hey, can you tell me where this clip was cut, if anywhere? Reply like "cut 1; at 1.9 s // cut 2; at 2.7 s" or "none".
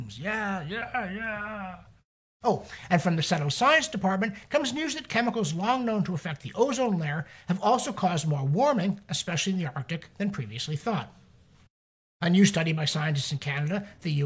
none